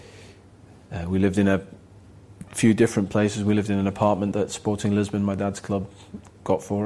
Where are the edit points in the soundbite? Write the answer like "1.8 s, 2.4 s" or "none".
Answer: 4.3 s